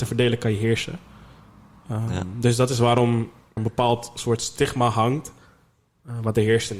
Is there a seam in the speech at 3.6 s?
yes; 1 cut; at 3.6 s

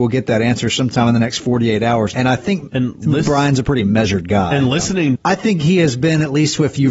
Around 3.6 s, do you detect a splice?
no; 2 cuts; at 2.1 s, 5.1 s

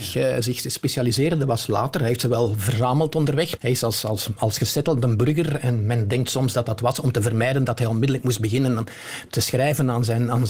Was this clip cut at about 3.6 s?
yes; 1 cut; at 3.6 s

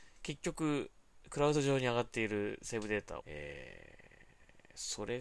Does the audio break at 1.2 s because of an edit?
no; 1 cut; at 3.2 s

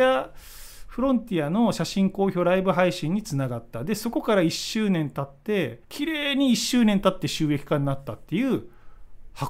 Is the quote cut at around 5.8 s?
yes; 1 cut; at 5.8 s

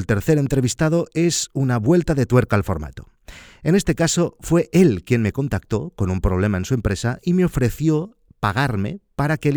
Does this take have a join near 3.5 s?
no; 0 cuts

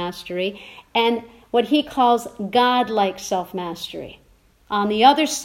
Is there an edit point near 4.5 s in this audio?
yes; 1 cut; at 4.5 s

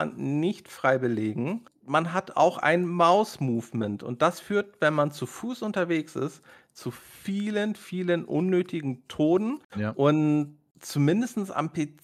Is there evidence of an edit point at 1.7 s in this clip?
no; 1 cut; at 9.7 s

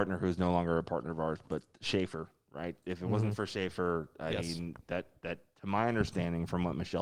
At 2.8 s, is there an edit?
no; 0 cuts

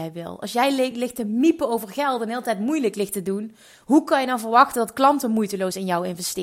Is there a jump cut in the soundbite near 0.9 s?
no; 0 cuts

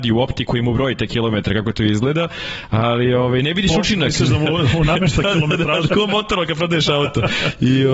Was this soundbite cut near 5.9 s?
yes; 1 cut; at 5.9 s

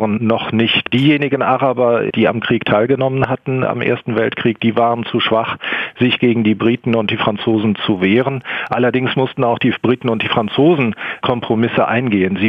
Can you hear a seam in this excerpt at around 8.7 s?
no; 1 cut; at 3.7 s

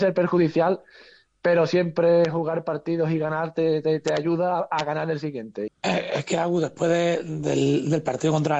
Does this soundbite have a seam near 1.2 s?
no; 1 cut; at 5.7 s

